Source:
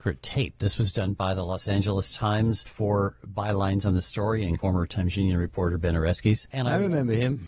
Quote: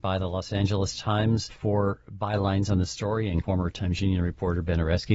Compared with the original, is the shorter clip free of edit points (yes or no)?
yes